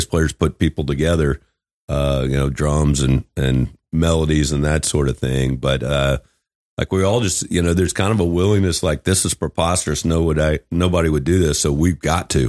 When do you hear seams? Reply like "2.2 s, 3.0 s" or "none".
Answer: none